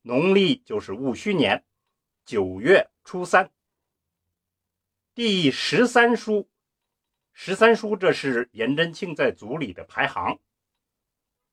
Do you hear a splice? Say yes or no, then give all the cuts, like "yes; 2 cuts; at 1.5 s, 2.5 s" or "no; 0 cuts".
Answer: no; 0 cuts